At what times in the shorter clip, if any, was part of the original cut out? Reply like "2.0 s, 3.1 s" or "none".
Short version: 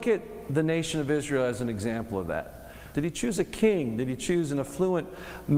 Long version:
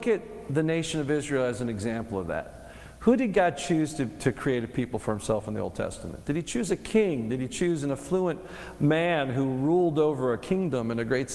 2.9 s